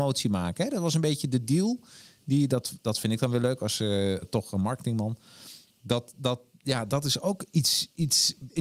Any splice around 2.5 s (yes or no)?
no